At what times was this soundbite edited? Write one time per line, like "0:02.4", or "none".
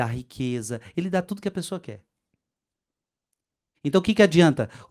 0:03.7